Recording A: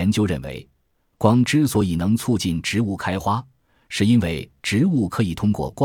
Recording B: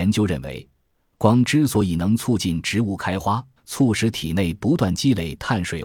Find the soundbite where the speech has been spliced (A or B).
B